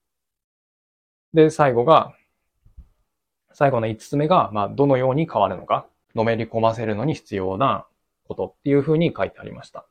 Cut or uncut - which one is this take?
cut